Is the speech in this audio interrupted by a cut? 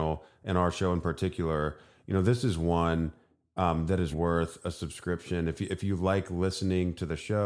yes; 1 cut; at 4.1 s

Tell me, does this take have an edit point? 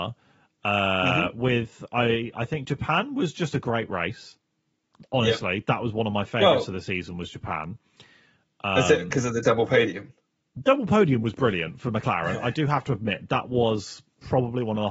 no; 0 cuts

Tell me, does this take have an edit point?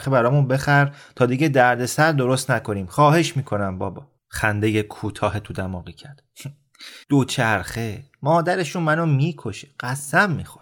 yes; 2 cuts; at 4.2 s, 7.0 s

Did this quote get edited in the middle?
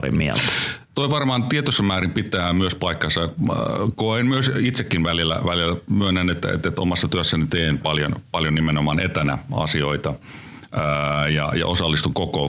no; 0 cuts

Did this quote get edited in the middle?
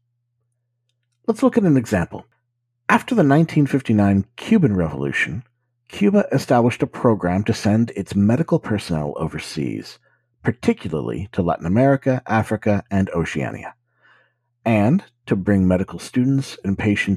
no; 0 cuts

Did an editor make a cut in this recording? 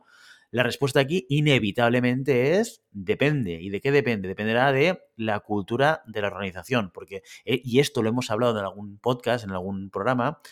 no; 0 cuts

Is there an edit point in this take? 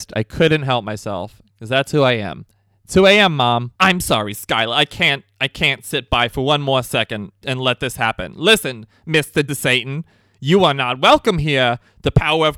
yes; 3 cuts; at 3.8 s, 7.4 s, 9.5 s

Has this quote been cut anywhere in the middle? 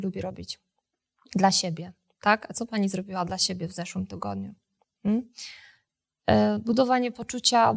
yes; 1 cut; at 6.2 s

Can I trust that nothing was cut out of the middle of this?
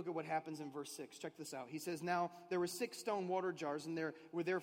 yes; 0 cuts

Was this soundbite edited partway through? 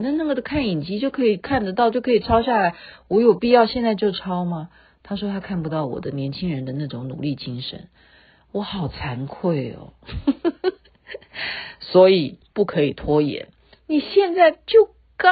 no; 0 cuts

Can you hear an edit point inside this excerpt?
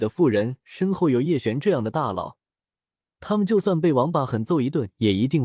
yes; 1 cut; at 4.3 s

